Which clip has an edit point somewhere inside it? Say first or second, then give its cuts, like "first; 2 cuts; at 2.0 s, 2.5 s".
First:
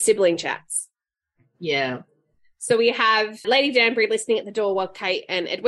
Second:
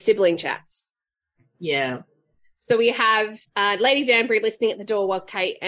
first; 1 cut; at 3.4 s